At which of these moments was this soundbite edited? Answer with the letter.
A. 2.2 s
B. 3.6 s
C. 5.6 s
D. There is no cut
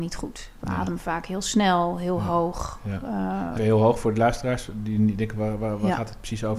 B